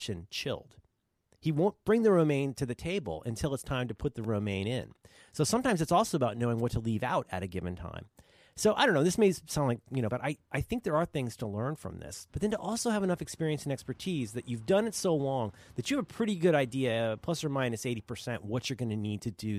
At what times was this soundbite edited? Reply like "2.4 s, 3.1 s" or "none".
10.1 s, 12.3 s